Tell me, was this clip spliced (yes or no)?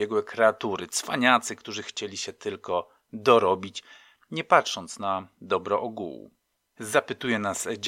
yes